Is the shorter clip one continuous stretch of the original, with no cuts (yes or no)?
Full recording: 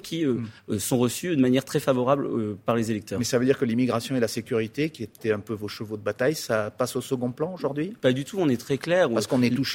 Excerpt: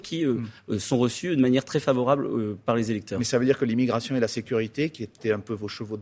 yes